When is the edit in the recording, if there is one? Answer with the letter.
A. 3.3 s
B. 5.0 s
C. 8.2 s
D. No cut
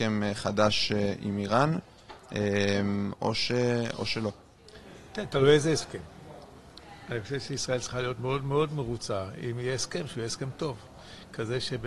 C